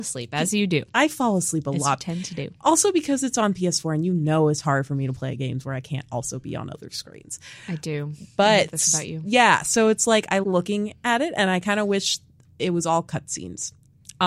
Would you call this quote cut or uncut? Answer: cut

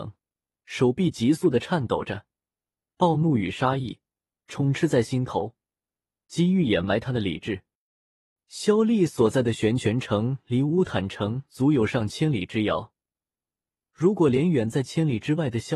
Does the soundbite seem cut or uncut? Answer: uncut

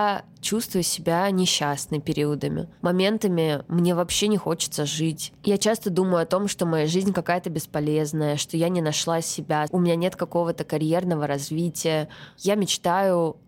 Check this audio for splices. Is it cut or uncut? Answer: cut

